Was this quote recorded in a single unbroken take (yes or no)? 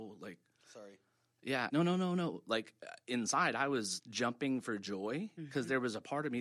no